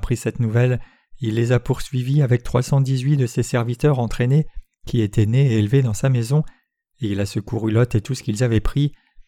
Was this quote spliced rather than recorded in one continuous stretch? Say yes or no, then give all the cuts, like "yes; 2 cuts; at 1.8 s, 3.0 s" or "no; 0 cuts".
no; 0 cuts